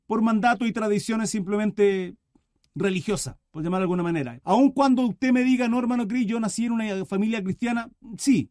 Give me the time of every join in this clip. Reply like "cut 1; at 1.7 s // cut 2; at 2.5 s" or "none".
cut 1; at 4.4 s